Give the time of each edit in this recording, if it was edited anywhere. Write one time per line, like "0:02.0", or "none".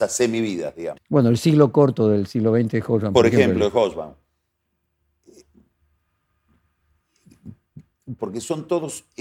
0:01.0
0:08.2